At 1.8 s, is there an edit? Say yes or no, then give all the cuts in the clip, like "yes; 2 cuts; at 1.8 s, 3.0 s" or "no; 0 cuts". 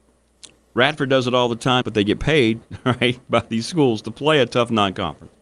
yes; 1 cut; at 1.8 s